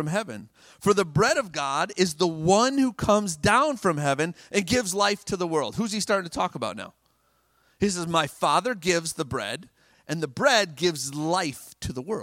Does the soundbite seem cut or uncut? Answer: cut